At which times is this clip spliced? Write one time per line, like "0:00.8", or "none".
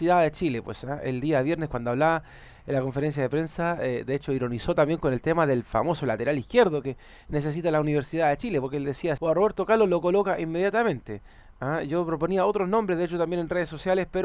0:09.2